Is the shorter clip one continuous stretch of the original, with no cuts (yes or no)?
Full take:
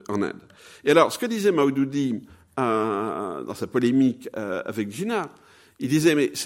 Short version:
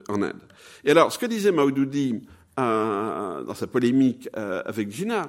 yes